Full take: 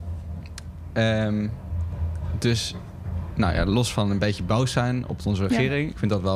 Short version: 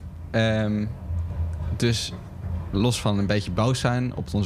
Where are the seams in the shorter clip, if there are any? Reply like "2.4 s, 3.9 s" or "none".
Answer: 2.7 s

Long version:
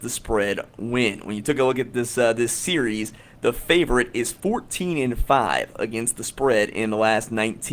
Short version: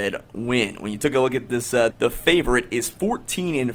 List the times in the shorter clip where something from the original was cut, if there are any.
1.9 s

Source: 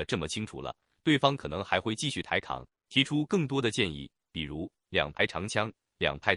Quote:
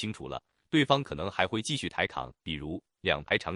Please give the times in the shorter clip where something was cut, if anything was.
2.4 s

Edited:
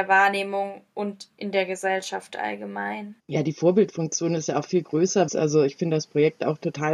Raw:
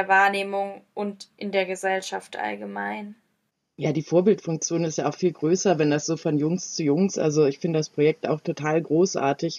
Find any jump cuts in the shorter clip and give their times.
3.2 s, 5.3 s

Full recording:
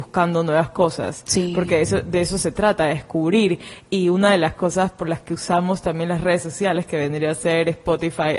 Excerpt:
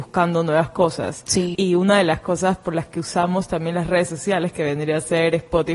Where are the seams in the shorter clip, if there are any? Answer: 1.5 s

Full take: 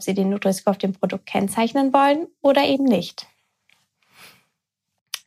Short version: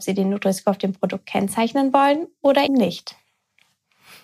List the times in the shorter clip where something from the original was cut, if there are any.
2.7 s

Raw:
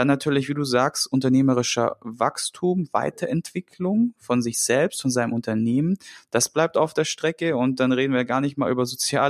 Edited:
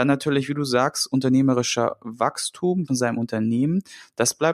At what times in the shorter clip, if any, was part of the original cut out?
2.9 s

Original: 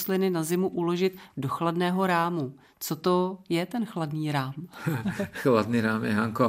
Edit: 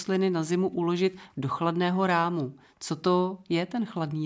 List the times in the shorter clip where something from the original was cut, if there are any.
none

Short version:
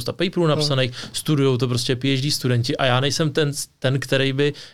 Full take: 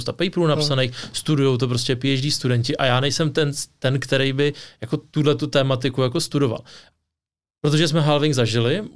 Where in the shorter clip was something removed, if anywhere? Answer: none

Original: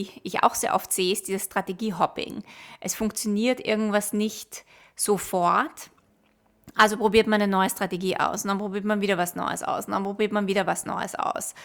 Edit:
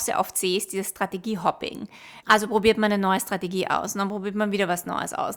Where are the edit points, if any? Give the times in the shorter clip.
2.2 s

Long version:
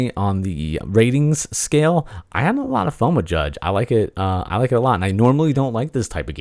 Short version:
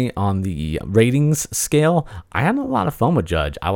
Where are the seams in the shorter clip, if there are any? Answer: none

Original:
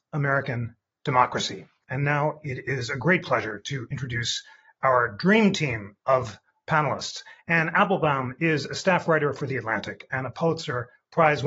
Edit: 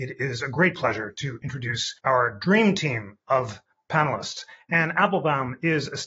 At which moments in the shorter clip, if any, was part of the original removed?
2.0 s

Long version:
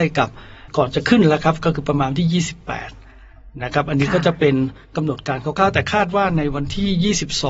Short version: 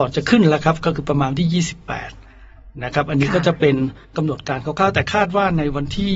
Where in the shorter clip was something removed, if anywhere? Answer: none

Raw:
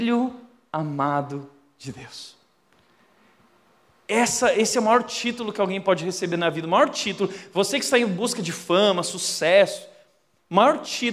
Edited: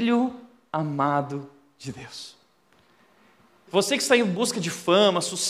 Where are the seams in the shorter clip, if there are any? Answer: 3.7 s

